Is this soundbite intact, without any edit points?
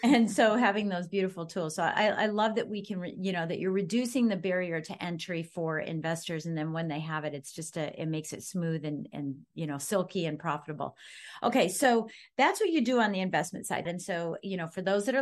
no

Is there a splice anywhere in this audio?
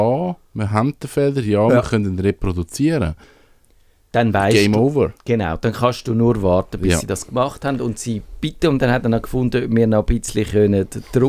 no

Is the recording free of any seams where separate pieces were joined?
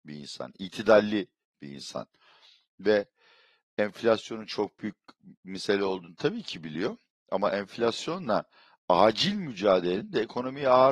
yes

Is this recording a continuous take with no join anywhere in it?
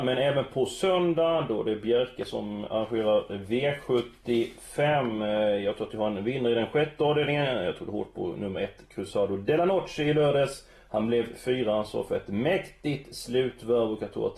yes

